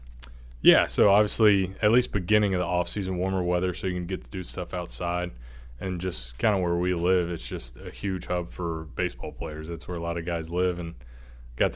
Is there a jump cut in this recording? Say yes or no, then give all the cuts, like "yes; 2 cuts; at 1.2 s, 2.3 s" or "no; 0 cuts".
no; 0 cuts